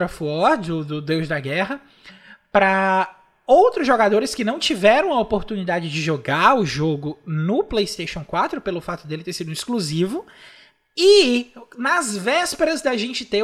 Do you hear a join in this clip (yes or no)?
no